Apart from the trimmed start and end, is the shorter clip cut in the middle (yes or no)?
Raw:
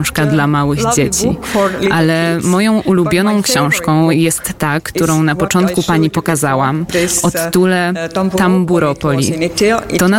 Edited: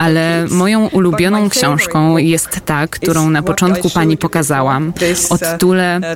no